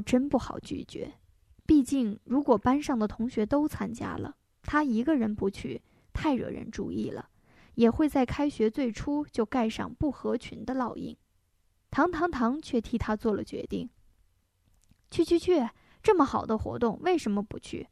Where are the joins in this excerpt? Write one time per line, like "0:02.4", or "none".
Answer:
0:11.9